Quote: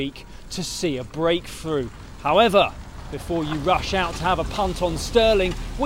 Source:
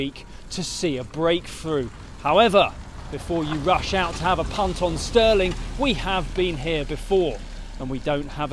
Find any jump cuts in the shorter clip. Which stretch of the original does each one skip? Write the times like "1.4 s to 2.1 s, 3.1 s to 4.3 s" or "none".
none